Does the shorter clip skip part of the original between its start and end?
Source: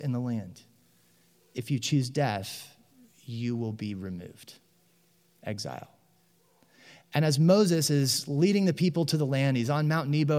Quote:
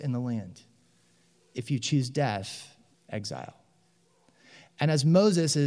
yes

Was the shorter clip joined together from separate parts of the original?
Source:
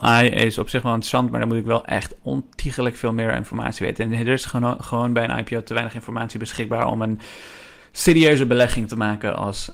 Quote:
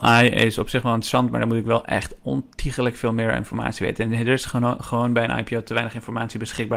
no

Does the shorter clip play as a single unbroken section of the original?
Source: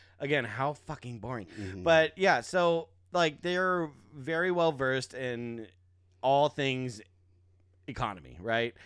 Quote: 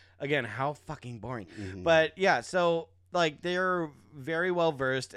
yes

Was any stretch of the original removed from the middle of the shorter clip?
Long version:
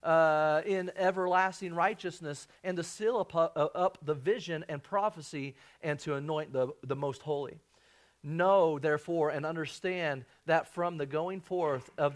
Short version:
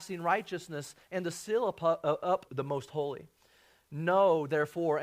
yes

